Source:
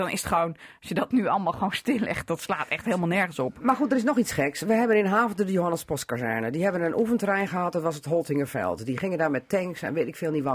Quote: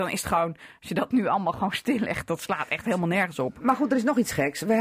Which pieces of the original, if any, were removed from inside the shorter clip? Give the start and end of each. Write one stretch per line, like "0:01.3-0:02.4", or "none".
none